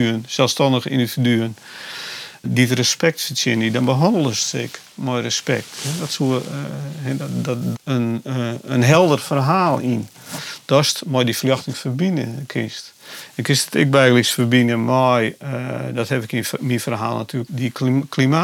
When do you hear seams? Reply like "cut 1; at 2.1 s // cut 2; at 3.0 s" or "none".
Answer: cut 1; at 2.4 s // cut 2; at 7.7 s // cut 3; at 17.5 s